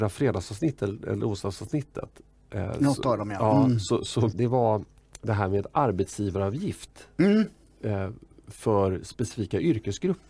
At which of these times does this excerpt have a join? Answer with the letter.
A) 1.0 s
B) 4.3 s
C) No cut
B